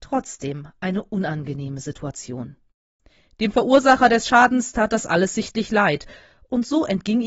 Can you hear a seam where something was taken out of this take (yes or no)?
no